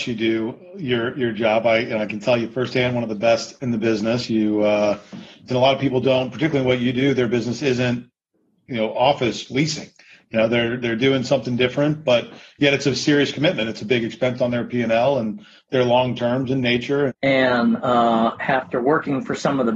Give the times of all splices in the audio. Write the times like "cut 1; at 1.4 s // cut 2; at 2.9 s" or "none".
cut 1; at 5.5 s // cut 2; at 17.1 s